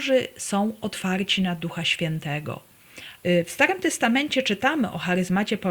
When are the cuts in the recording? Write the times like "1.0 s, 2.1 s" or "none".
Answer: 3.2 s